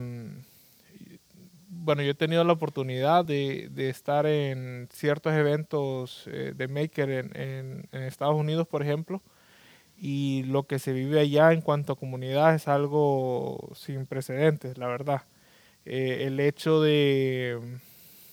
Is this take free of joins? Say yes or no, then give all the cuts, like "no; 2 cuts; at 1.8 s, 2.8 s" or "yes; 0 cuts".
yes; 0 cuts